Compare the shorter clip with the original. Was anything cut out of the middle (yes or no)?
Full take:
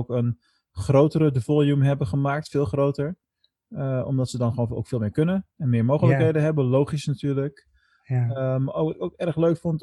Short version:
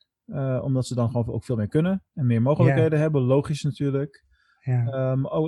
no